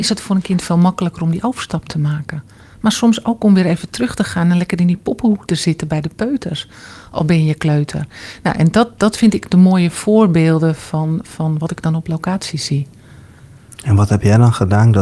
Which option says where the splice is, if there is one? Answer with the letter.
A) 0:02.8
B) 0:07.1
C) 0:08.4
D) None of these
D